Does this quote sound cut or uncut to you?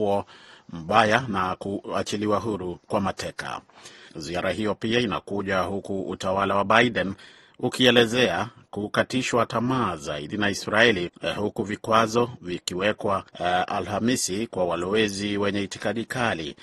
cut